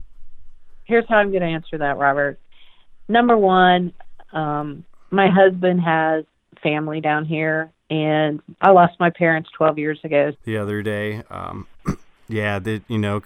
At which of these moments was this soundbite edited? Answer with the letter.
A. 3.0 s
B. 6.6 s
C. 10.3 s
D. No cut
C